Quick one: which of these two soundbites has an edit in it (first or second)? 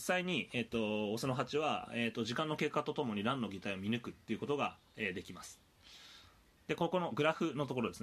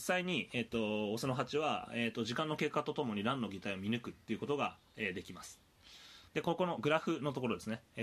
second